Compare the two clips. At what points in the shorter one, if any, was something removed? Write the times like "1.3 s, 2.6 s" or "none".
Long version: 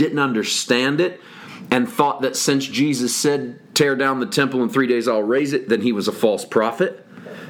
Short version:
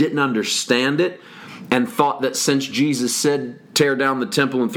none